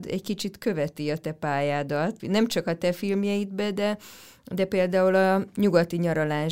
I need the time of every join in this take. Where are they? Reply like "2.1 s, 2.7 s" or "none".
2.2 s